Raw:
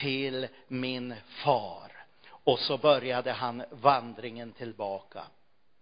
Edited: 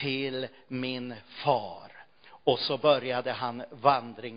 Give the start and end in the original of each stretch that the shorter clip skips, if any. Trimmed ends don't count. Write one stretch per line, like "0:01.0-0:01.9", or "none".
none